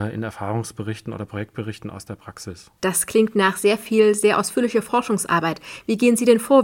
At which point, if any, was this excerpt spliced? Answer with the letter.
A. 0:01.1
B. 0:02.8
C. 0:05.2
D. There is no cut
B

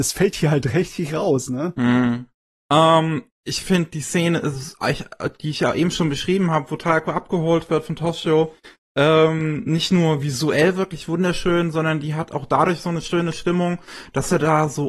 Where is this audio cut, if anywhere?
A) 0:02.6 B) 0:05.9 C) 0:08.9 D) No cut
A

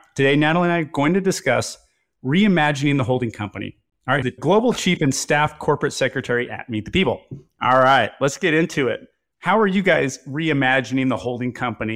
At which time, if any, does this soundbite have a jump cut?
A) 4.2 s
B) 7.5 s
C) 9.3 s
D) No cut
A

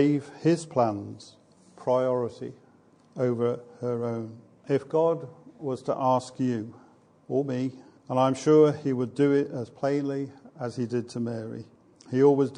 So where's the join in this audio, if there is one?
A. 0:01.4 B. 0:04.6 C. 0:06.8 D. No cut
D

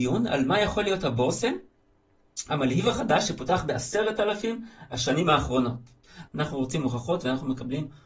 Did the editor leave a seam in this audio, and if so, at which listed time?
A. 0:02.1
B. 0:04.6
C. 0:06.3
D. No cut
C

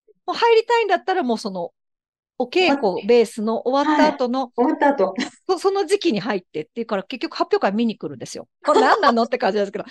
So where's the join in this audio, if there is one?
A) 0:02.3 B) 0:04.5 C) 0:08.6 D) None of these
C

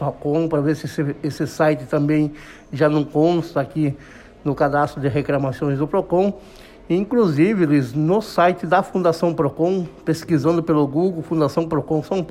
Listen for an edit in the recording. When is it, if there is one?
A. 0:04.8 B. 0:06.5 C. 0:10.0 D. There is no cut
D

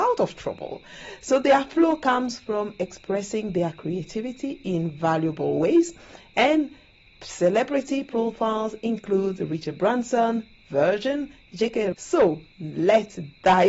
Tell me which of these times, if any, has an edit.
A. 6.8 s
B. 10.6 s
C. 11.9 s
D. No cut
C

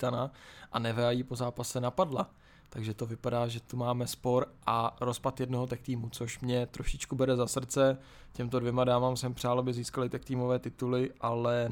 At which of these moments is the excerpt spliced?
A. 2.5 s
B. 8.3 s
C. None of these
C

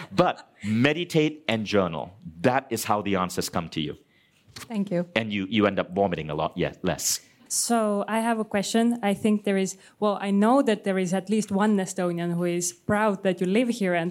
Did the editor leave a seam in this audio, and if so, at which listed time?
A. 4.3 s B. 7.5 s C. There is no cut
B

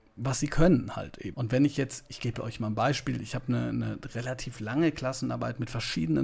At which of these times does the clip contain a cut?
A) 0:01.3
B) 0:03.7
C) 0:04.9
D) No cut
A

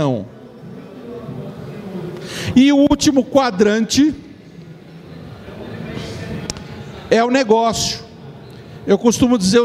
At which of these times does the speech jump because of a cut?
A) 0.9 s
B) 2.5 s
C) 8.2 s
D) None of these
B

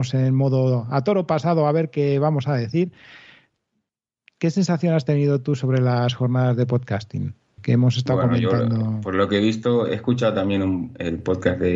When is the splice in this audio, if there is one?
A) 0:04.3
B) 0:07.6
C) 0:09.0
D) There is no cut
B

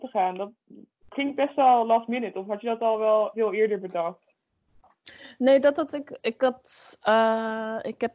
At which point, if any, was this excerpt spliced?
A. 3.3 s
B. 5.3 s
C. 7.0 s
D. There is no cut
A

